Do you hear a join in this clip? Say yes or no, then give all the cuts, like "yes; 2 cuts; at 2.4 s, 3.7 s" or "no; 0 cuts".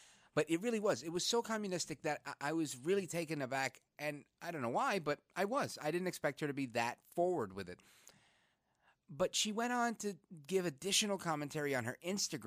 no; 0 cuts